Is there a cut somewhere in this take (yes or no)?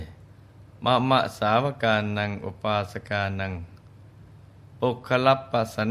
no